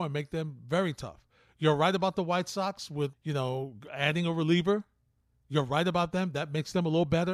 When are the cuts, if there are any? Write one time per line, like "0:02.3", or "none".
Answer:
0:03.1

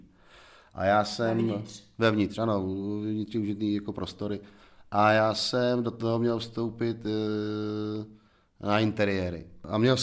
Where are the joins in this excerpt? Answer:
none

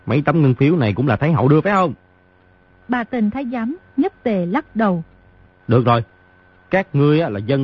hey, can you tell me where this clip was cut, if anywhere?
0:05.5

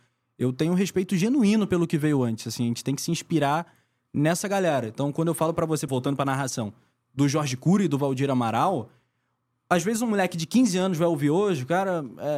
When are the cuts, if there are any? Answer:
0:05.9

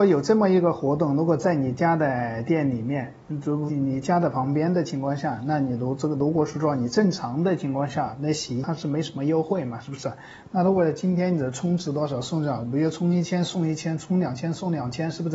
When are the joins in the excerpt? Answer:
0:03.7

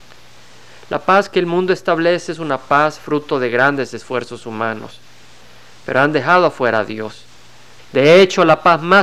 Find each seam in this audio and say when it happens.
0:07.8

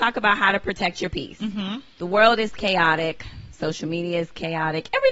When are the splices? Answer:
none

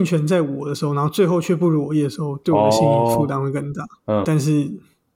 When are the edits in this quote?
0:04.2

